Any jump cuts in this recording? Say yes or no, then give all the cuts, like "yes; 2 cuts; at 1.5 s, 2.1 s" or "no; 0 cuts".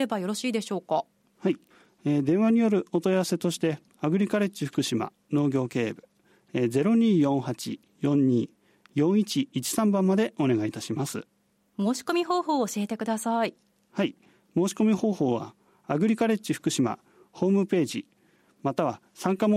no; 0 cuts